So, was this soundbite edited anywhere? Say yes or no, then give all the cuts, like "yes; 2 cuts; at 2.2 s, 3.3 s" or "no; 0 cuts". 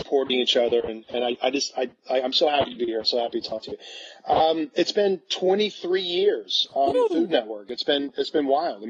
no; 0 cuts